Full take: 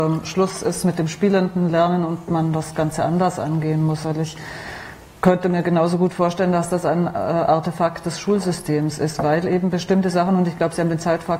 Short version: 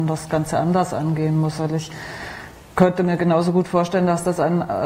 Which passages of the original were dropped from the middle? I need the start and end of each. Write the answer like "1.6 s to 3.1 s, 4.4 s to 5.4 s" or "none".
none